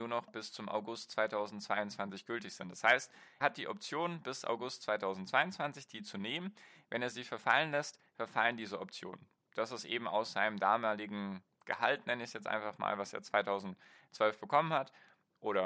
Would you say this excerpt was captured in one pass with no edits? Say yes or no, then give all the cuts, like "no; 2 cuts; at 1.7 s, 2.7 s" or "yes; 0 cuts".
no; 1 cut; at 3.4 s